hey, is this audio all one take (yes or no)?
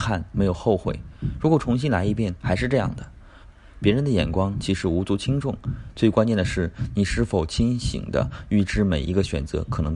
no